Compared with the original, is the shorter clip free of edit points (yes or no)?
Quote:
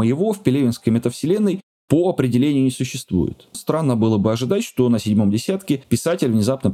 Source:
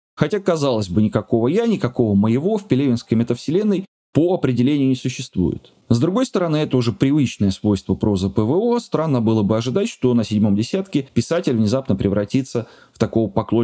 no